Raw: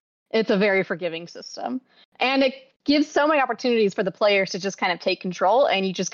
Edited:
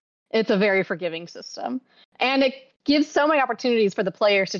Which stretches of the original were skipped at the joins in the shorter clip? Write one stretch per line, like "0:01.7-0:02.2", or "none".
none